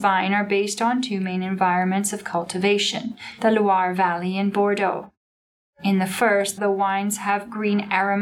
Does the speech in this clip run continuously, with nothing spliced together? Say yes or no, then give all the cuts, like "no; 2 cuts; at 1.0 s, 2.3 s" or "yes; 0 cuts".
no; 1 cut; at 6.6 s